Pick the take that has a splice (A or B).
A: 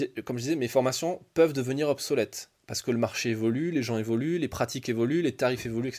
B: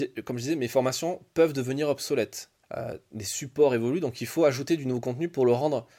B